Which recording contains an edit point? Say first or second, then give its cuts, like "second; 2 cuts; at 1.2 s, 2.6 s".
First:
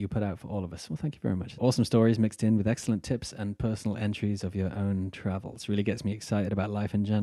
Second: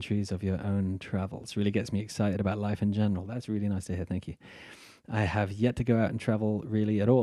first; 1 cut; at 1.5 s